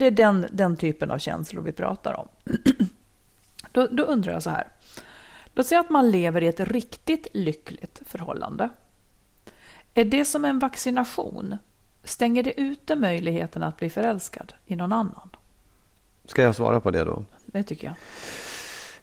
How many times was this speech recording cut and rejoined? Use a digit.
0